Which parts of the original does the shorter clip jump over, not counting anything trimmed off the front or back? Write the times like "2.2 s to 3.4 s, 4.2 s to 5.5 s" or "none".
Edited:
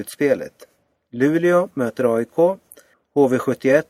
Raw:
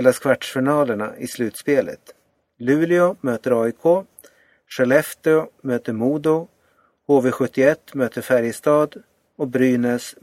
4.4 s to 6.9 s